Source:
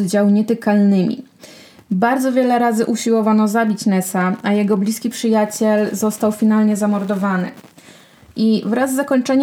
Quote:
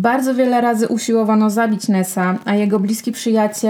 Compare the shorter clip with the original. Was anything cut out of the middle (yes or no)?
no